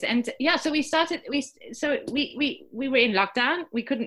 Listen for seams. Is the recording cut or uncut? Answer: uncut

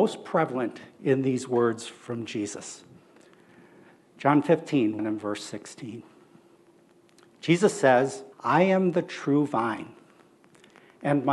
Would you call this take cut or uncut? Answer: cut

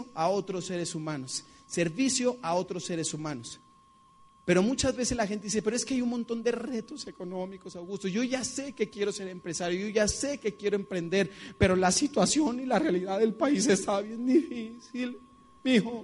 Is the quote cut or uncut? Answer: uncut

